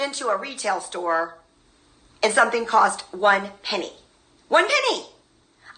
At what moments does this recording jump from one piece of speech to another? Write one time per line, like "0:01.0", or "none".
none